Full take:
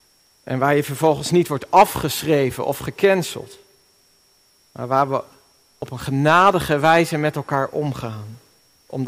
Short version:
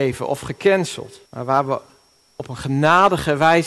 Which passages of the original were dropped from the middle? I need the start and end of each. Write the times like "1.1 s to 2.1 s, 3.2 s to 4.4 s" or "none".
3.6 s to 4.7 s

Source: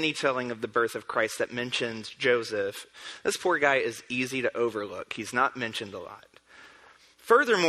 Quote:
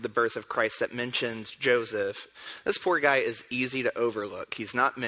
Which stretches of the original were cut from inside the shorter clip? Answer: none

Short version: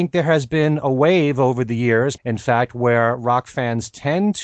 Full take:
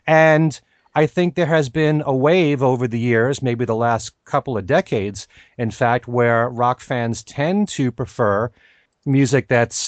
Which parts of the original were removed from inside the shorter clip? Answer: 3.4 s to 5.5 s

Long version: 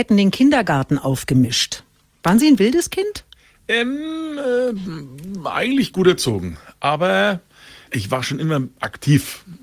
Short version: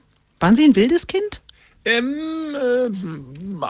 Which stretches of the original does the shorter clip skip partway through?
none

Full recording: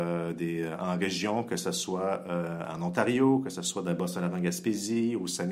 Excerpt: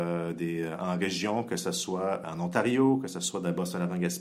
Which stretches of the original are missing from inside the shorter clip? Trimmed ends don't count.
2.2 s to 2.7 s

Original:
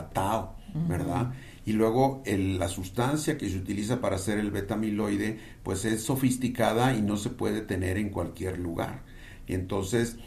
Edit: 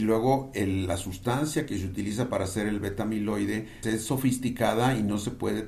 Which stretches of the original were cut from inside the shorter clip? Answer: 5.5 s to 5.8 s

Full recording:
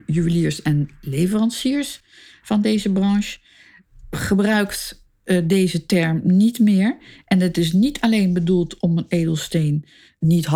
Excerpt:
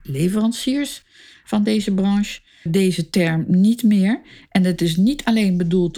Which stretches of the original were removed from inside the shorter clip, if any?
3.6 s to 5.4 s

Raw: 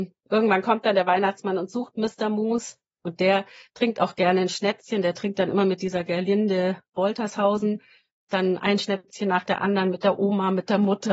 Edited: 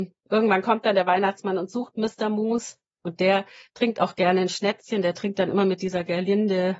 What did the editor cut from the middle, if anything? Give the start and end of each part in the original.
none

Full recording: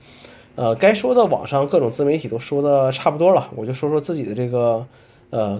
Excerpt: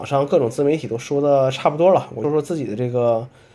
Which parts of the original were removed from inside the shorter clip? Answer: 3.6 s to 3.8 s

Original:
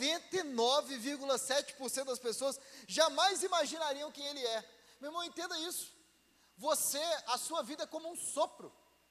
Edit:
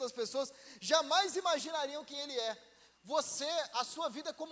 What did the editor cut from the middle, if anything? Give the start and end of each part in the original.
5.0 s to 6.4 s

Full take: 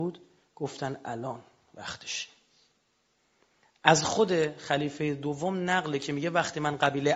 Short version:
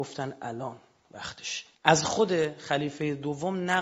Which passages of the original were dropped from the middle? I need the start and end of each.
2.4 s to 3.7 s

